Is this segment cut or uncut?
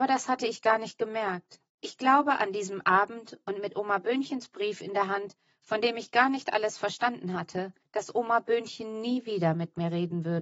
cut